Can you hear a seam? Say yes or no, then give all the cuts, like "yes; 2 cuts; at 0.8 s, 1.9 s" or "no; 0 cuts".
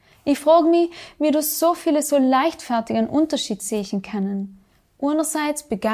no; 0 cuts